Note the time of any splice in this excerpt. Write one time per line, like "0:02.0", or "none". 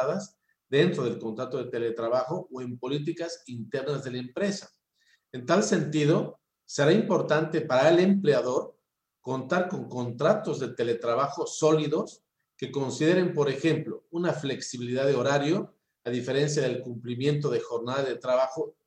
0:05.1